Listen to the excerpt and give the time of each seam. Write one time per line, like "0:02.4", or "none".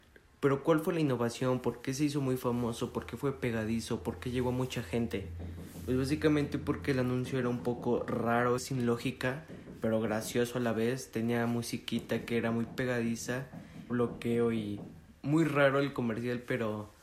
0:08.6
0:13.9